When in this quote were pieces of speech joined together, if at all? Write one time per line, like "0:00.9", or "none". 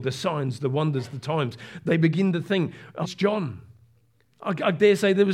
0:03.0